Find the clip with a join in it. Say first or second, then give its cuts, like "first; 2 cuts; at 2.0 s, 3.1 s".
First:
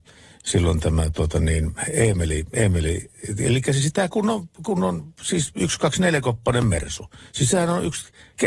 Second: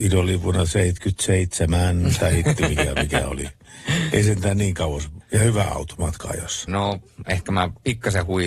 second; 2 cuts; at 5.2 s, 6.7 s